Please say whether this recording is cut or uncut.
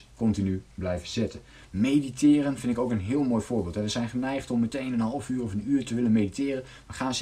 uncut